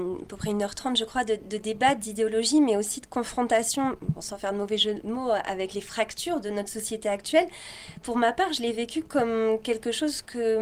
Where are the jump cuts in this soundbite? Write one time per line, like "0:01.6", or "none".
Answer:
none